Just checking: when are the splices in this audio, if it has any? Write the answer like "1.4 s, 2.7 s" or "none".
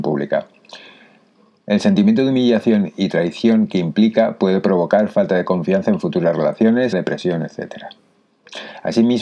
6.9 s